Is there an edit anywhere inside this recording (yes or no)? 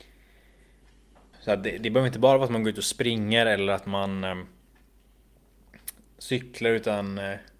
yes